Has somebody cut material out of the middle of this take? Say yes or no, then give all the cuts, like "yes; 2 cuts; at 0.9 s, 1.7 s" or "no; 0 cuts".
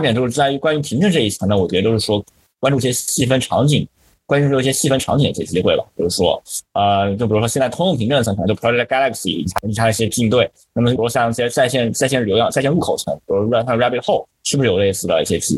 yes; 1 cut; at 11.0 s